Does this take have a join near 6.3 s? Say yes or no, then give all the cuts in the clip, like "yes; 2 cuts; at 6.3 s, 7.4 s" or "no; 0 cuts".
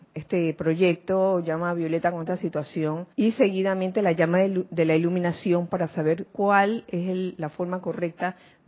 yes; 2 cuts; at 3.1 s, 6.3 s